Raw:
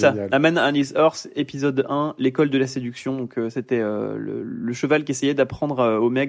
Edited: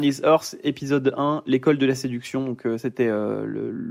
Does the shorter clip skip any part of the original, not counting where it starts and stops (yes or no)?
no